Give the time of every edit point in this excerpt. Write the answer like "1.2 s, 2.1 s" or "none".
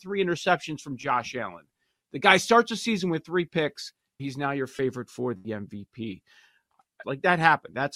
4.2 s, 7.0 s